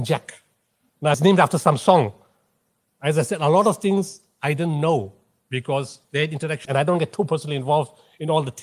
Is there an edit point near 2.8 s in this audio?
no; 2 cuts; at 1.1 s, 6.6 s

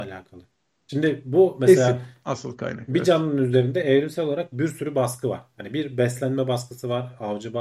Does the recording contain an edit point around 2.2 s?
no; 0 cuts

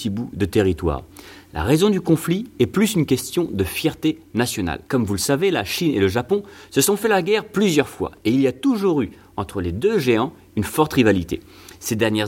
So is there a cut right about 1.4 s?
no; 1 cut; at 4.9 s

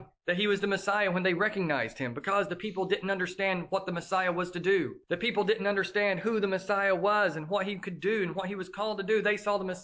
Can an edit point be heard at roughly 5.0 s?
yes; 1 cut; at 5.0 s

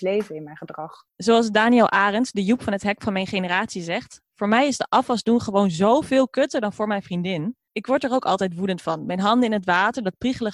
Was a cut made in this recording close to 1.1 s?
yes; 1 cut; at 1.1 s

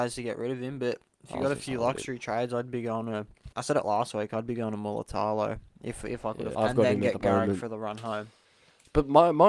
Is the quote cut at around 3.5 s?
yes; 2 cuts; at 3.5 s, 6.5 s

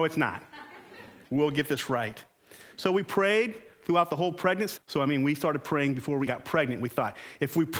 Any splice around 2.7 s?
no; 3 cuts; at 1.2 s, 4.8 s, 6.3 s

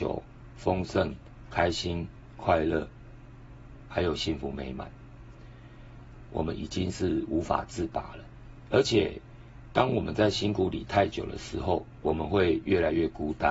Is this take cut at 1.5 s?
no; 2 cuts; at 6.3 s, 8.7 s

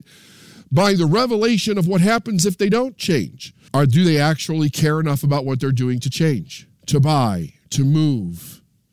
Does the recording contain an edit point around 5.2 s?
no; 2 cuts; at 3.7 s, 6.8 s

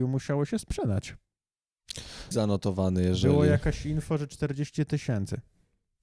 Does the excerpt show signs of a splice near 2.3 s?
yes; 1 cut; at 2.3 s

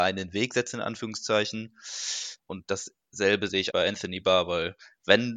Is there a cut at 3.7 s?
yes; 2 cuts; at 2.4 s, 3.7 s

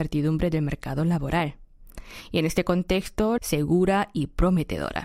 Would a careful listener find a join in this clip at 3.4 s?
yes; 1 cut; at 3.4 s

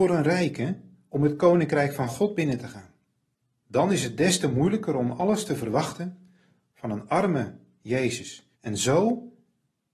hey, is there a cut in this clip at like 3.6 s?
yes; 2 cuts; at 3.6 s, 8.6 s

